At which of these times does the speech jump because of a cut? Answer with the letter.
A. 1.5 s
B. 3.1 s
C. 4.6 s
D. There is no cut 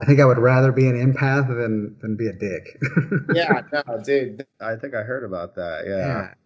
C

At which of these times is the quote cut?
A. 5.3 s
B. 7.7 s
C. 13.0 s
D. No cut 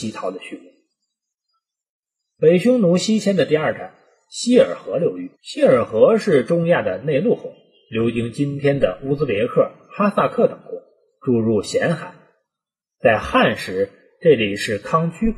A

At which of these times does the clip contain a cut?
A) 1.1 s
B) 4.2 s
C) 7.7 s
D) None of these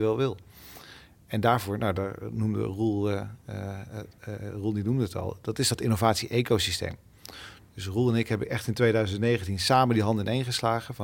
B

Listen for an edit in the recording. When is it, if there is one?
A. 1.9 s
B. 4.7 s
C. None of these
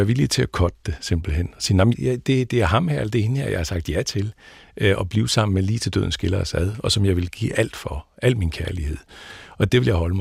A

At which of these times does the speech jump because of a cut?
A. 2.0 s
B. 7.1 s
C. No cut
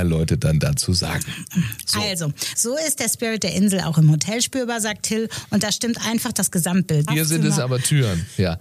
B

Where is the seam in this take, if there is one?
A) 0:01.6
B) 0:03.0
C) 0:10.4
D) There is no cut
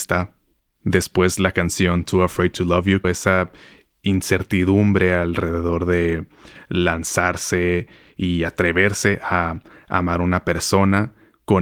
B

